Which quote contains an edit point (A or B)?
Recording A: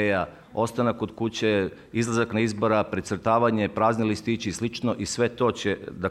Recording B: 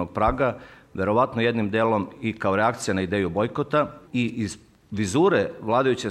B